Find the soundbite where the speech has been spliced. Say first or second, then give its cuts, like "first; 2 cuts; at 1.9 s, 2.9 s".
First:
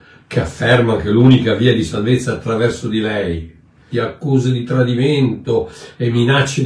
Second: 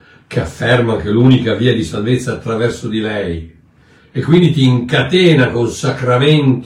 first; 1 cut; at 3.9 s